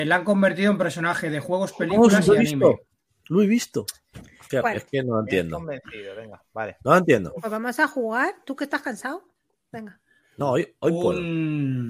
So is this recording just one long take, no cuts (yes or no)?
no